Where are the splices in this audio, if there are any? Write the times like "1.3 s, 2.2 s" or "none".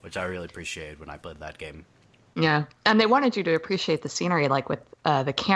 none

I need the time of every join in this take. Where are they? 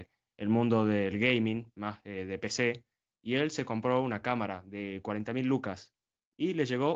none

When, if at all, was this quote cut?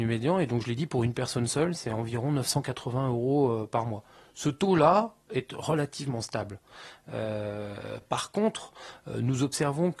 none

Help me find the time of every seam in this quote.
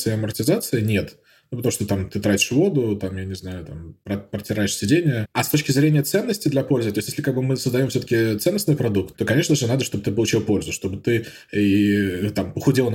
9.1 s

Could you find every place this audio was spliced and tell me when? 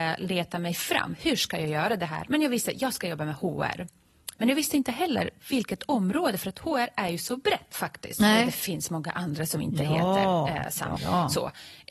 7.7 s, 11.0 s

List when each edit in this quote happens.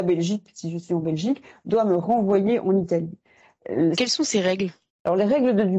3.9 s

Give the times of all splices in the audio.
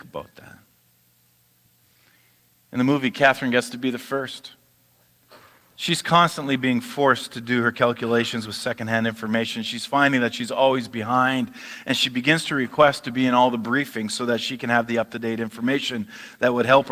none

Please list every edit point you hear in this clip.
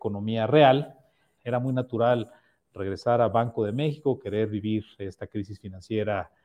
1.4 s

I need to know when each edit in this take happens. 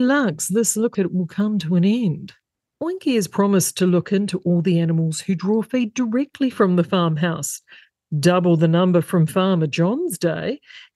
0.9 s

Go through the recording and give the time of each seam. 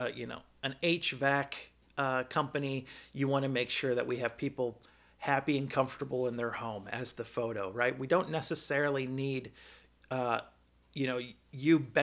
none

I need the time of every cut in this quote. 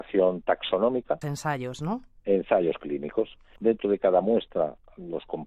1.2 s, 3.6 s

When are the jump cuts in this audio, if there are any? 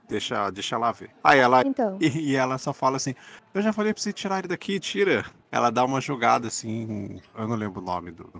7.3 s

